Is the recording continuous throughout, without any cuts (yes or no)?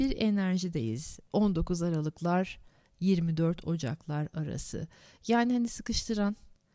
yes